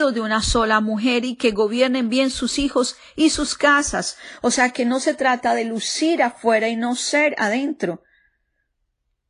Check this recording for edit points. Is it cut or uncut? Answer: uncut